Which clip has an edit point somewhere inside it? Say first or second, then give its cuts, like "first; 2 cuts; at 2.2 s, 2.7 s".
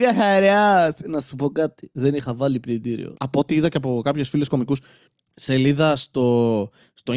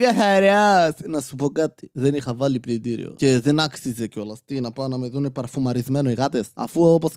first; 1 cut; at 3.2 s